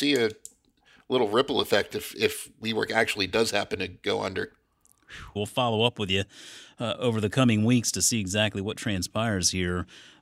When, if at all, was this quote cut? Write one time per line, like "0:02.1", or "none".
0:05.4